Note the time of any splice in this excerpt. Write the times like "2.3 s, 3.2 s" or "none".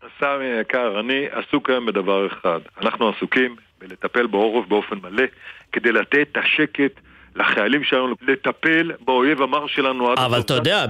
8.1 s